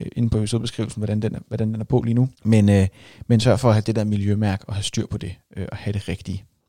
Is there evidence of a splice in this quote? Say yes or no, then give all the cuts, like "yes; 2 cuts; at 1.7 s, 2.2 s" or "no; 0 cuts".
yes; 1 cut; at 2.3 s